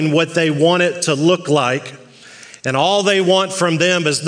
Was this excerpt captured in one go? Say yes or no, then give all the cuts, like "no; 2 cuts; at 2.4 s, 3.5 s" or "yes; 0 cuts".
yes; 0 cuts